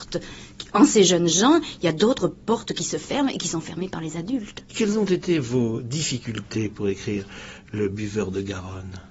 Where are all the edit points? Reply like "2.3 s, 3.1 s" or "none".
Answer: 4.7 s